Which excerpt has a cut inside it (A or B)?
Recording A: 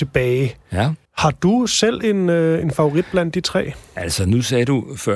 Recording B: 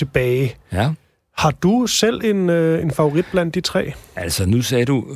A